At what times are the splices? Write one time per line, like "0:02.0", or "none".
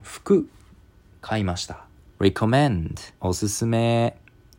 0:02.1
0:03.2

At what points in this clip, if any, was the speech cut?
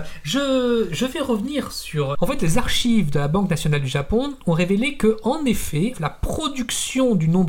0:02.1
0:05.9

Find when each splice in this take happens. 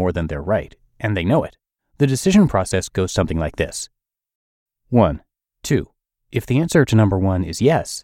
0:01.8
0:05.5

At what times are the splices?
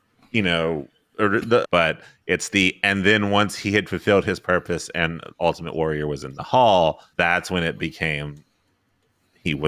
0:01.6
0:07.1

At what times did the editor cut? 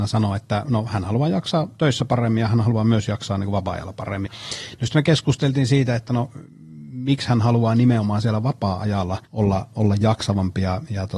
0:04.3
0:09.3

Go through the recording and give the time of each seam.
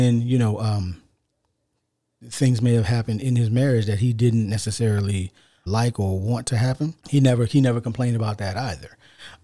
0:05.7
0:07.0

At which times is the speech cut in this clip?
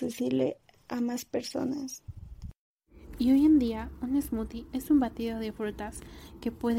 none

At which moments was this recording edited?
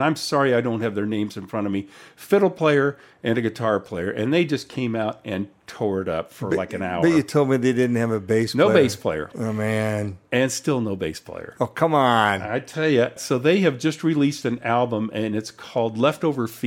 0:09.3
0:13.2

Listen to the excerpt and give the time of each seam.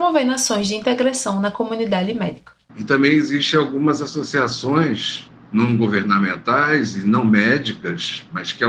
0:02.7

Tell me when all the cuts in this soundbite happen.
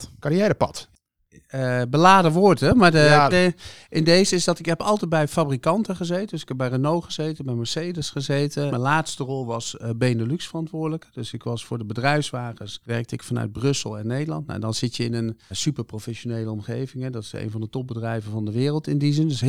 0:03.3
0:08.7
0:15.5

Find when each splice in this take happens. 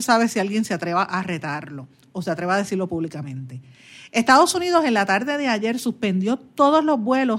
none

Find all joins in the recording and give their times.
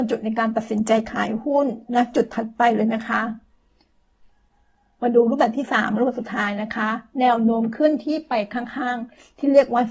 0:01.8

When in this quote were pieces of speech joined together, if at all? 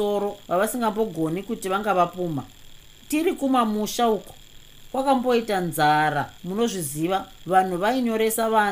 0:07.4

